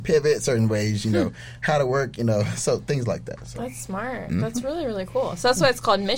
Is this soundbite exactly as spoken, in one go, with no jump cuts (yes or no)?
yes